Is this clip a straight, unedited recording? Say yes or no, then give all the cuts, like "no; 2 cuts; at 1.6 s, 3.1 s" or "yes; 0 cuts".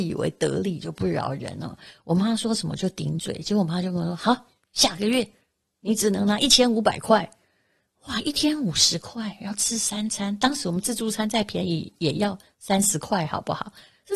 yes; 0 cuts